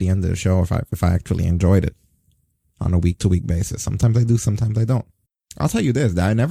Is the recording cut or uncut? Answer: uncut